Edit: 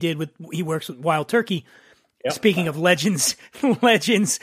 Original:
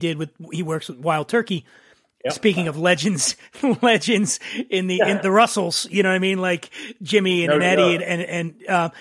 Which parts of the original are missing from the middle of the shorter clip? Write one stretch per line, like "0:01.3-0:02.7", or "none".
none